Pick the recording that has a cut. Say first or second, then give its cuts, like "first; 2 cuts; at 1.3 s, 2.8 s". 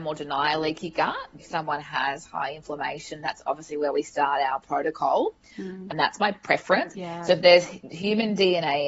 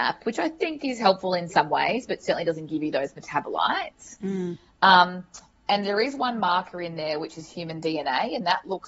first; 3 cuts; at 1.4 s, 5.9 s, 6.9 s